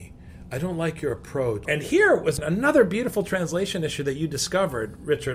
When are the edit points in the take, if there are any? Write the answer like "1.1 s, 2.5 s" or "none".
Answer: 1.6 s

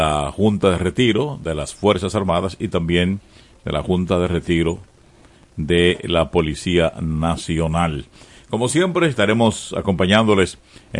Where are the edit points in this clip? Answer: none

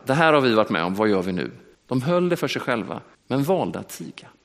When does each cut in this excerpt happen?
1.7 s, 3.1 s

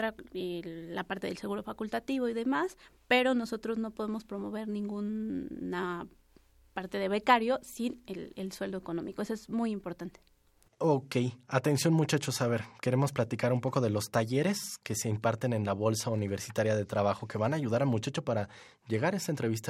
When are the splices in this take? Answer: none

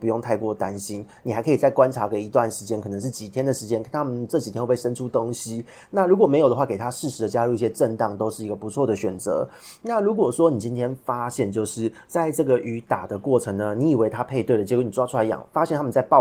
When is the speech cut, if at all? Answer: none

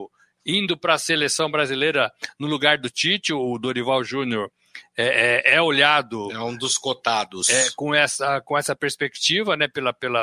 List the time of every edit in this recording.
none

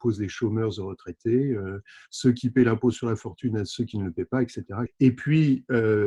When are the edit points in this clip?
4.9 s

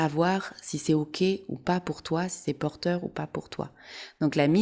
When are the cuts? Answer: none

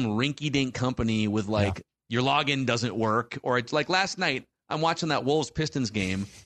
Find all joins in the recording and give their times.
1.9 s

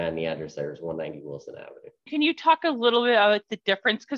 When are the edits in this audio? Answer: 2.1 s

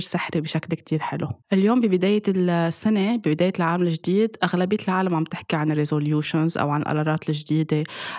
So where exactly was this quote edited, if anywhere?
1.4 s

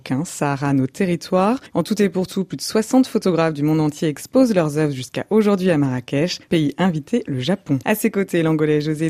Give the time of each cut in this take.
1.7 s, 7.8 s

